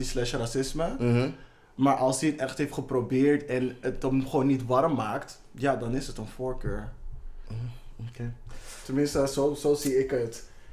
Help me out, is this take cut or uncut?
uncut